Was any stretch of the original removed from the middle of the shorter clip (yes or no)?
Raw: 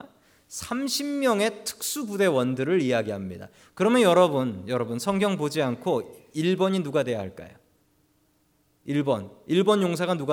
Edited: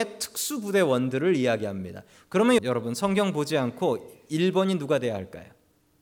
yes